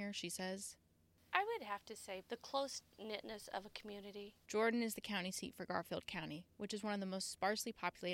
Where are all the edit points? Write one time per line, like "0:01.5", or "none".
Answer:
0:02.2
0:04.5